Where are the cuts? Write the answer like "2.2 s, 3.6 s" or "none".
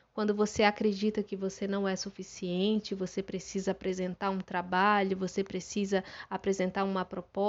none